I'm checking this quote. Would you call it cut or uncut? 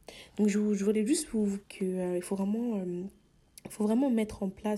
cut